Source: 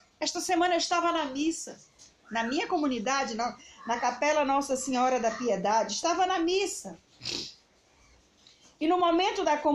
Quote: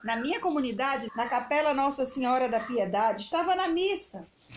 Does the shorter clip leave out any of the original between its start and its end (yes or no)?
yes